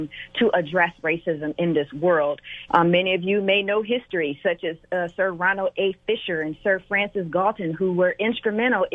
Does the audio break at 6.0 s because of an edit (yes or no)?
no